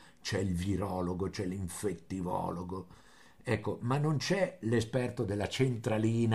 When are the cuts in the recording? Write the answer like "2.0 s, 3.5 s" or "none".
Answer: none